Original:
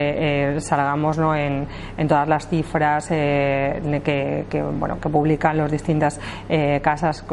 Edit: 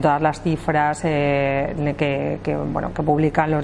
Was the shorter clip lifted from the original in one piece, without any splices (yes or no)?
yes